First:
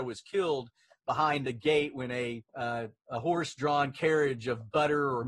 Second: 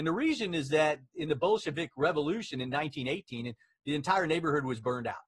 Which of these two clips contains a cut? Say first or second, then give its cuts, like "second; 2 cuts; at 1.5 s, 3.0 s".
first; 1 cut; at 2.5 s